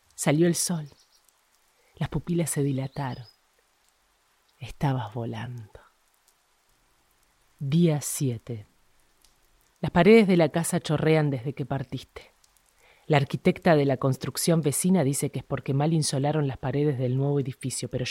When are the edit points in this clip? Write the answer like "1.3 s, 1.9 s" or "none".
none